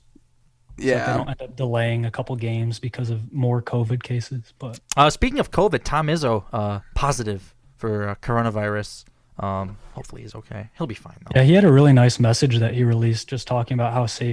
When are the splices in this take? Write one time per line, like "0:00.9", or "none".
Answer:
none